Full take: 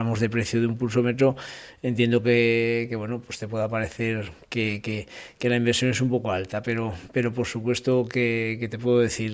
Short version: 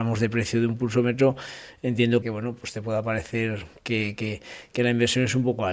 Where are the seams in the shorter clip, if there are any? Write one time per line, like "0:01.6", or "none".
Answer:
0:02.2